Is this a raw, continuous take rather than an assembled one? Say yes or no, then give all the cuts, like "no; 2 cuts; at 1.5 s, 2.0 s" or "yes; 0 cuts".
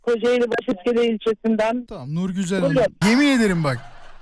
no; 2 cuts; at 1.9 s, 3.0 s